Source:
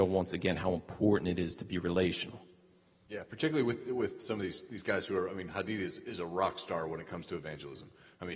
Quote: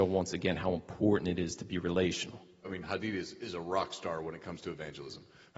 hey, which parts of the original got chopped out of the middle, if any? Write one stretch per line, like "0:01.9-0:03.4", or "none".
0:02.6-0:05.3